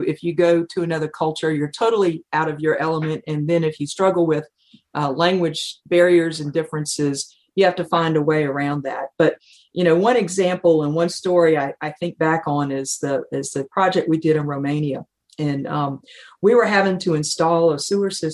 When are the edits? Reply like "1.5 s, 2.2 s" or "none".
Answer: none